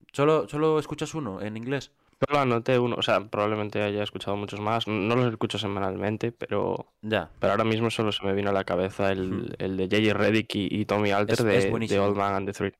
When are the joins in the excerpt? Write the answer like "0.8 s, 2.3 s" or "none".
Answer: none